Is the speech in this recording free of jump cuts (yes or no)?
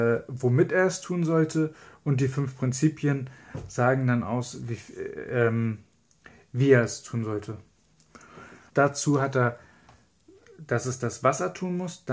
no